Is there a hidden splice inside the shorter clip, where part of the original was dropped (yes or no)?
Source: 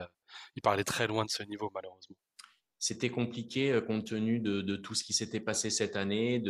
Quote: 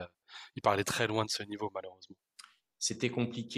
no